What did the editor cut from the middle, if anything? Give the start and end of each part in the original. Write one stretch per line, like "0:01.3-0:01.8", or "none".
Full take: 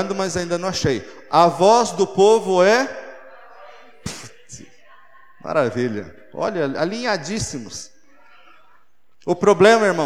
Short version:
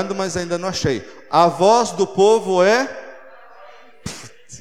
none